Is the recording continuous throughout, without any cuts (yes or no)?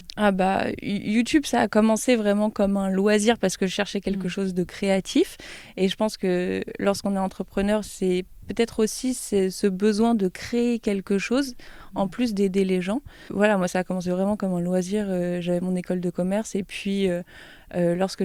yes